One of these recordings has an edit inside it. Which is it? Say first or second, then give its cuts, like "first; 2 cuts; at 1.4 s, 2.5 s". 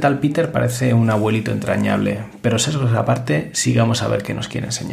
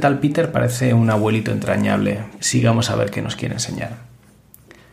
second; 1 cut; at 2.4 s